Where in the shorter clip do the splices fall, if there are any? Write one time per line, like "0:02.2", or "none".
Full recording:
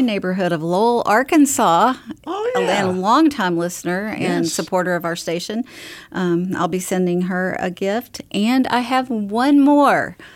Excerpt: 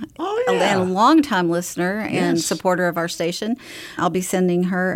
0:04.0